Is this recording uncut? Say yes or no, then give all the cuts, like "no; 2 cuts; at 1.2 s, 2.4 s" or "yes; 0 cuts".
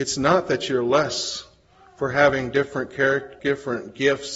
no; 1 cut; at 3.4 s